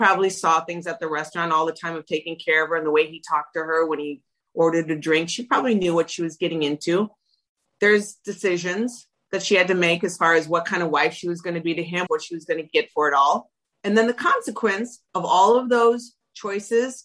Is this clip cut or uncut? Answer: cut